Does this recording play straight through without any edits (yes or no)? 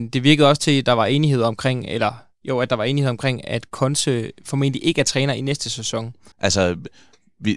no